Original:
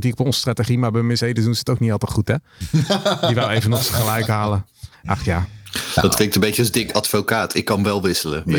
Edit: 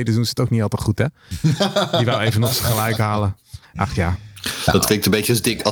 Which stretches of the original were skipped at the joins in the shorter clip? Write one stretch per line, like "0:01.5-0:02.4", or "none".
none